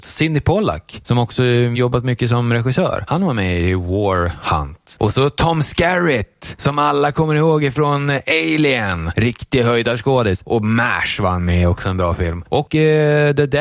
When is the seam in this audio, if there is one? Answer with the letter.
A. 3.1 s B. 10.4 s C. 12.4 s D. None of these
D